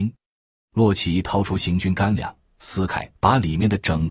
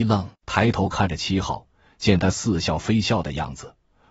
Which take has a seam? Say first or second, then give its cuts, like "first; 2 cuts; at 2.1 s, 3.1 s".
first; 1 cut; at 3.2 s